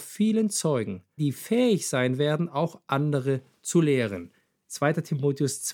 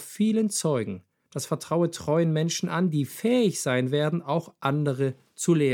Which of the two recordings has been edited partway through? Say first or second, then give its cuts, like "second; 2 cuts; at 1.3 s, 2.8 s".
first; 1 cut; at 1.2 s